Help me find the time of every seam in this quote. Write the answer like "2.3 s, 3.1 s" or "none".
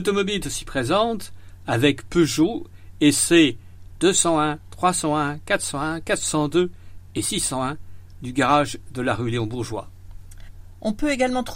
none